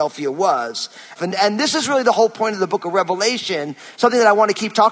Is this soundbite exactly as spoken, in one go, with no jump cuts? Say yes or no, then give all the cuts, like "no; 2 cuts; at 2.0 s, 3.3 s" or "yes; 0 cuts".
no; 1 cut; at 1.2 s